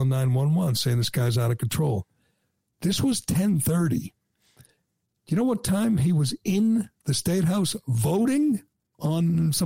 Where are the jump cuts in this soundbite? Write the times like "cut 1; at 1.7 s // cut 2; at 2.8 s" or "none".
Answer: none